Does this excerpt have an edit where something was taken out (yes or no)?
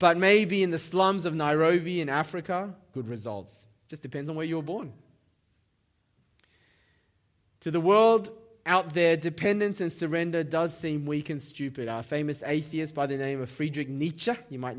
yes